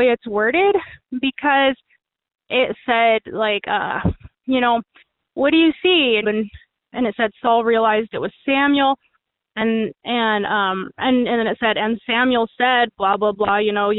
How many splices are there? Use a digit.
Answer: 1